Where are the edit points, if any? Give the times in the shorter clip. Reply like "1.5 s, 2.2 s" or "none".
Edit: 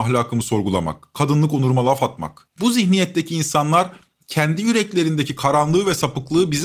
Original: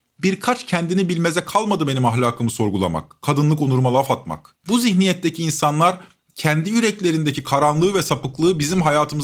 none